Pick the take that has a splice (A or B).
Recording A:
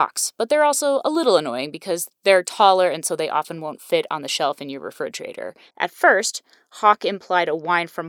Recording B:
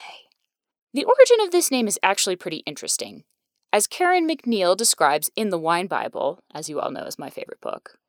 A